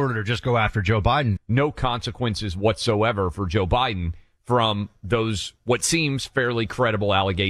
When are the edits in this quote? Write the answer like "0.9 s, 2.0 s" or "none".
1.4 s